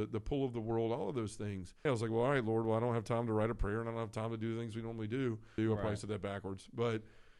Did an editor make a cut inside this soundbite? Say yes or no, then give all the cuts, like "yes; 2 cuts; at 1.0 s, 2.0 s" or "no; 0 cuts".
yes; 2 cuts; at 1.9 s, 5.6 s